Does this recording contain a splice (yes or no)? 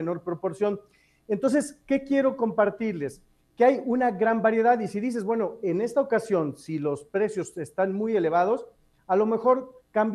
no